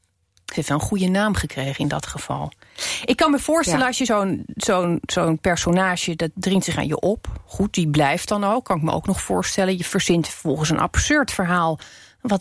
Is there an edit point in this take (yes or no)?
no